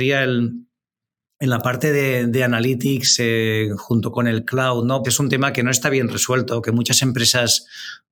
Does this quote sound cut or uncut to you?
cut